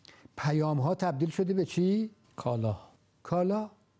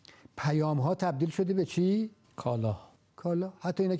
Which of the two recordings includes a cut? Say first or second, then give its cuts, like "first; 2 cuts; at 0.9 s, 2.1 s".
second; 1 cut; at 3.1 s